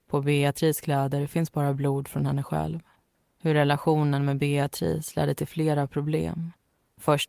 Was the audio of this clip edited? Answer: yes; 1 cut; at 3.3 s

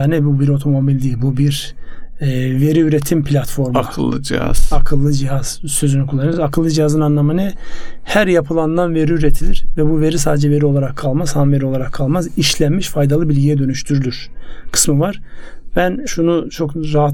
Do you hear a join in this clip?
no; 0 cuts

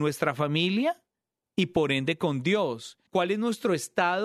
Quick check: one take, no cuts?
no; 1 cut; at 3.1 s

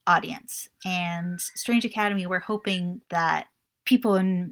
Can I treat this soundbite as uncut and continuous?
no; 1 cut; at 3.0 s

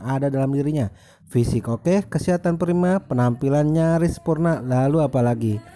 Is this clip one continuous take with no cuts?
no; 1 cut; at 1.2 s

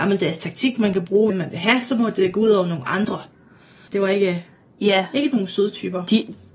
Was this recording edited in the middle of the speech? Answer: yes; 2 cuts; at 1.3 s, 3.9 s

